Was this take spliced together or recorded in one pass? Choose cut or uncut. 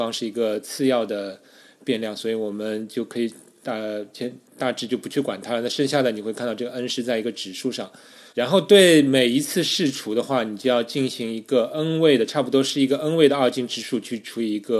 cut